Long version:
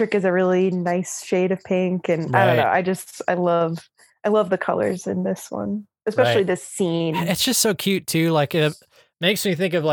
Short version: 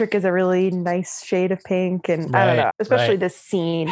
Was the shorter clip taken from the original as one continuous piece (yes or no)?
no